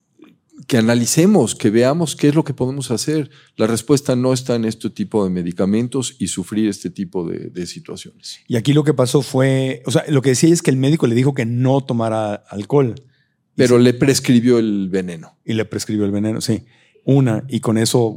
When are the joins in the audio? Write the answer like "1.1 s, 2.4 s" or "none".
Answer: 16.9 s